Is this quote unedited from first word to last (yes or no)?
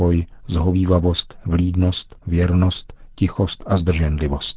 no